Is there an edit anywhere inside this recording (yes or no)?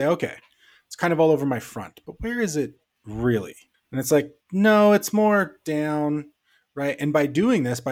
yes